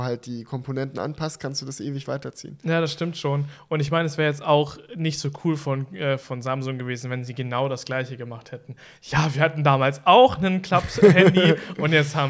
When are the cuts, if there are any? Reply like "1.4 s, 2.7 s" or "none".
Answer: none